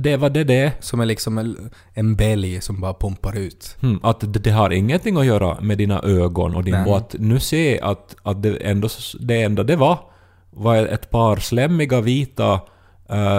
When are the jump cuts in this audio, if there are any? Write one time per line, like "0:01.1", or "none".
0:06.9